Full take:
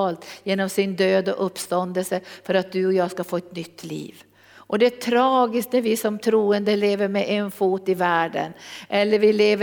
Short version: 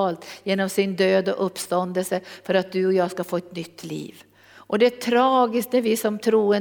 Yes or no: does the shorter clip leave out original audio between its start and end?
no